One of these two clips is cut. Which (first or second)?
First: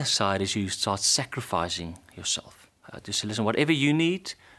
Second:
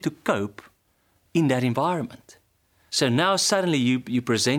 second